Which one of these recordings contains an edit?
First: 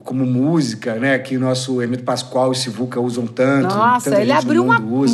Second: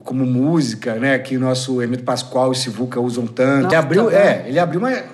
second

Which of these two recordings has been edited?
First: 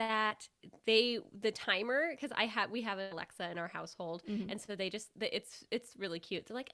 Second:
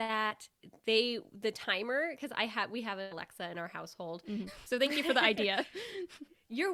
second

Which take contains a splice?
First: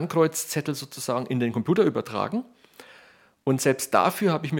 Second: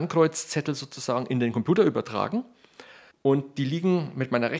second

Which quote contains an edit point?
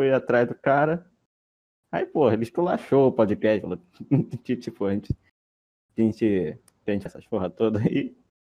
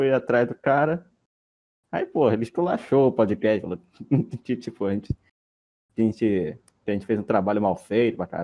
first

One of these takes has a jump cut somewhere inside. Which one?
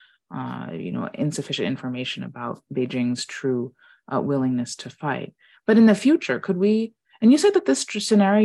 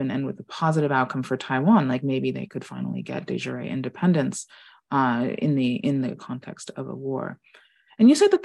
first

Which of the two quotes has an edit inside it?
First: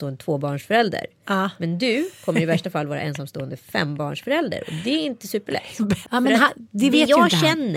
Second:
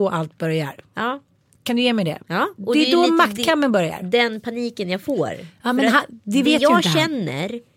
first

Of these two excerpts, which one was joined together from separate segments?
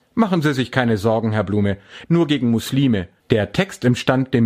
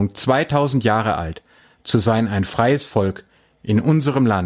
first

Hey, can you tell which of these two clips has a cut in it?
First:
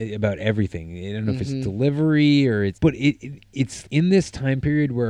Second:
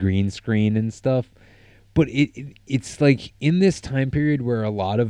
first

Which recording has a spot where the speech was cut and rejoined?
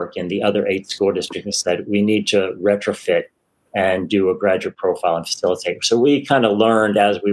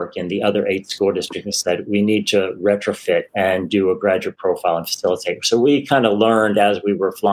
second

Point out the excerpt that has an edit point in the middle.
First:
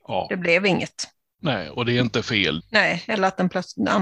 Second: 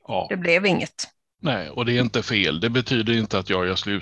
first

